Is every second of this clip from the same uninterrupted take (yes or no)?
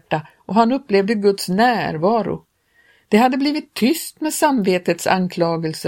yes